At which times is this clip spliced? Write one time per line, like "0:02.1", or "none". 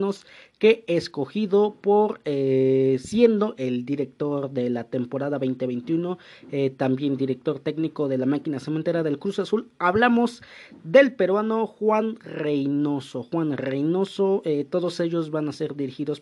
none